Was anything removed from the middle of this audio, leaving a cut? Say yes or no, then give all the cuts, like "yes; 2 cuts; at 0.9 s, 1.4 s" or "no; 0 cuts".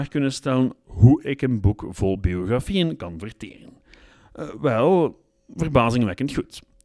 no; 0 cuts